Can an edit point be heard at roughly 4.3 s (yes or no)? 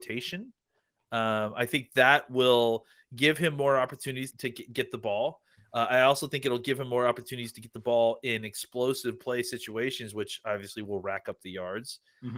yes